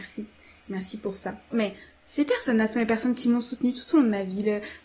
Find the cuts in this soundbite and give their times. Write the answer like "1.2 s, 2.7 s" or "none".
1.5 s